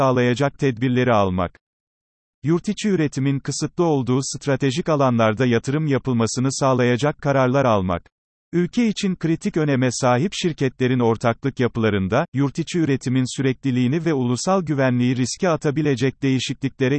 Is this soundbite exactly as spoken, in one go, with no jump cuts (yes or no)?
yes